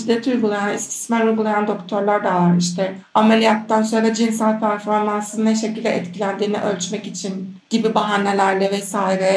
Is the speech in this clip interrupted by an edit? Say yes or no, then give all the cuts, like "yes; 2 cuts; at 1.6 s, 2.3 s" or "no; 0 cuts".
no; 0 cuts